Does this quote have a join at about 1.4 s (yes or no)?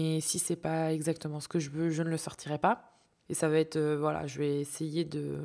no